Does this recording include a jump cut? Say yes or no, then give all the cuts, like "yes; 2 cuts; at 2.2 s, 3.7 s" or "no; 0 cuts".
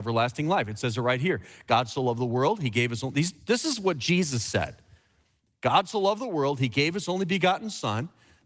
no; 0 cuts